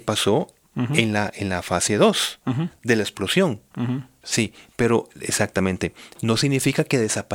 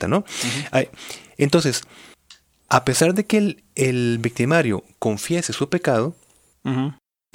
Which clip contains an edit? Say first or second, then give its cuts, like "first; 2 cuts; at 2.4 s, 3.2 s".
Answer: first; 1 cut; at 4.2 s